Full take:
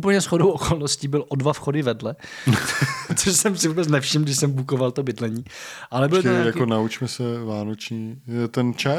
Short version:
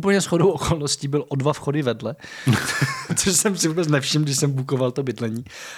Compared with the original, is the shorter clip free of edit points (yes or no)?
yes